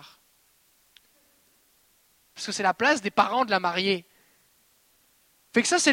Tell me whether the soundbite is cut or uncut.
uncut